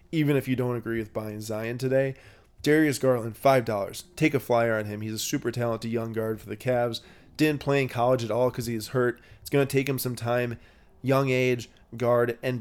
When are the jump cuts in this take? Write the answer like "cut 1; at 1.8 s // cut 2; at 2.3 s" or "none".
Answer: none

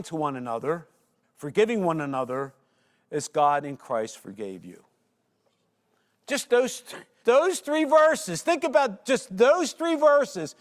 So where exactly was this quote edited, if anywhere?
cut 1; at 1.2 s // cut 2; at 7.2 s

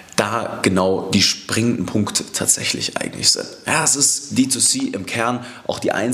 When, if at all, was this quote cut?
none

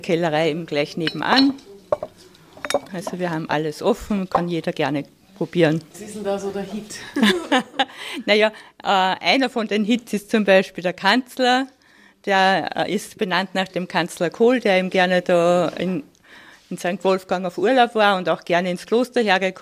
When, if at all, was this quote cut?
cut 1; at 2.9 s

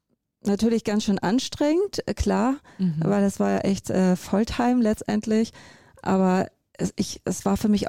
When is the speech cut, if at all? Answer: none

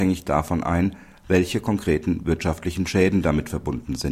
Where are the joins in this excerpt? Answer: none

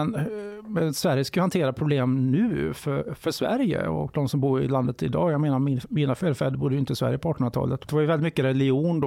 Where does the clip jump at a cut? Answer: cut 1; at 7.9 s

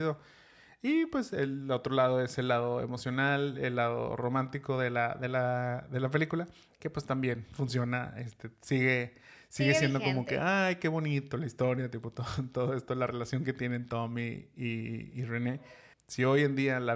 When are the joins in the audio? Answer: cut 1; at 15.9 s

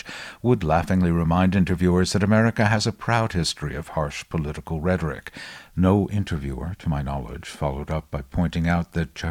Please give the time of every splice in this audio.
cut 1; at 5.7 s

